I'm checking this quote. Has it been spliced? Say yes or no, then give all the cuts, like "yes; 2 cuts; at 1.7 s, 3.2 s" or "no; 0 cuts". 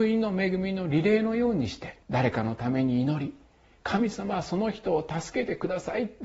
yes; 1 cut; at 2.0 s